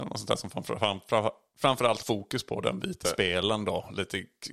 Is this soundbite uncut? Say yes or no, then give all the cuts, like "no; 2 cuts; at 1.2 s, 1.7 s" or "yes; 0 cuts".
no; 2 cuts; at 2.0 s, 3.0 s